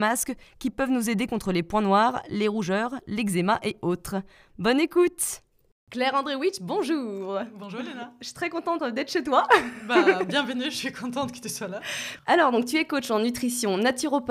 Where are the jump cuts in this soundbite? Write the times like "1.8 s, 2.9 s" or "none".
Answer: none